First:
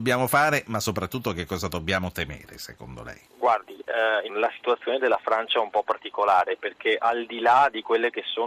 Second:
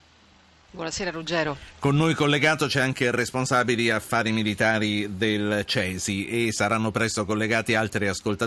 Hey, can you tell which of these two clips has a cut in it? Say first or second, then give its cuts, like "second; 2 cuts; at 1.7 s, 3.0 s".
first; 2 cuts; at 3.3 s, 4.3 s